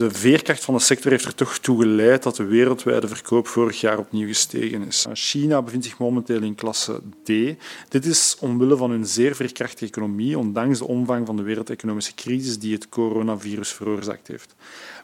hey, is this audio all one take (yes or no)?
no